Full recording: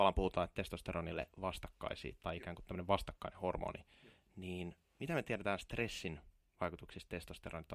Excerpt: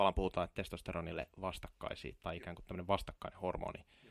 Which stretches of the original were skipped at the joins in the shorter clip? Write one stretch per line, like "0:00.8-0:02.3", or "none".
none

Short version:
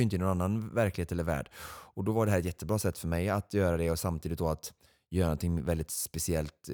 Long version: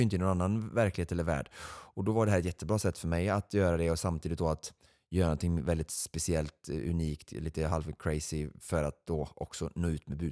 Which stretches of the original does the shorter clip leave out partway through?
none

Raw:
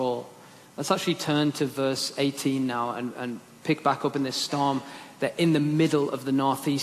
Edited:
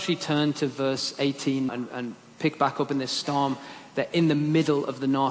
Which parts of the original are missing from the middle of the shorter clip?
0:02.7-0:02.9

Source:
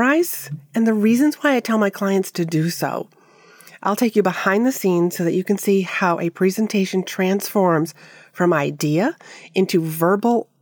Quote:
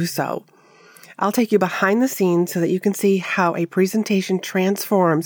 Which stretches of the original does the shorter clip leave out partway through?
none

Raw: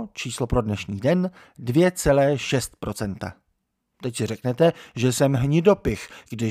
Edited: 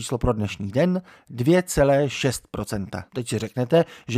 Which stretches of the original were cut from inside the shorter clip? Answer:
0:03.4-0:03.9

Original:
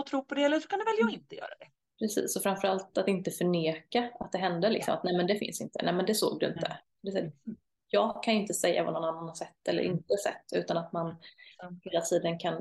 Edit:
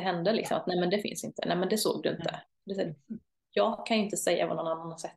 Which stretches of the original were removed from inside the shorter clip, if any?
none

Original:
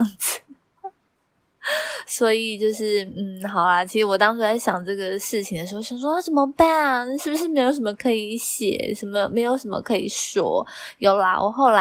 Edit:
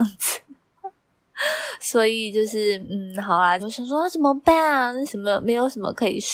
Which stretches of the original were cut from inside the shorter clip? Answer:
0:01.0-0:01.2
0:03.9-0:05.7
0:07.2-0:08.9

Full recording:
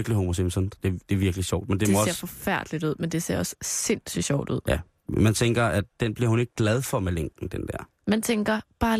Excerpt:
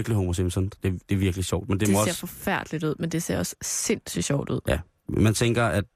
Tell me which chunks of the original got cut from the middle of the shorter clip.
none

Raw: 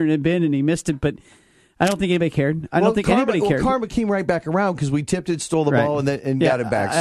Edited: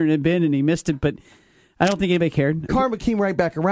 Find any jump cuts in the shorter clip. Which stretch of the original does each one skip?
0:02.7-0:03.6

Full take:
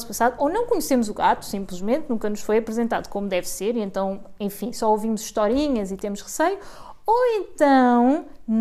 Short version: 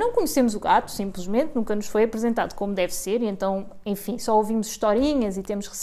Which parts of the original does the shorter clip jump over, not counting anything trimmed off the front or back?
none

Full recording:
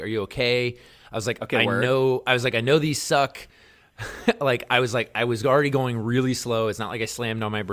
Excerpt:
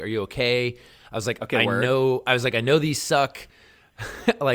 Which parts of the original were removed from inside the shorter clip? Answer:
none

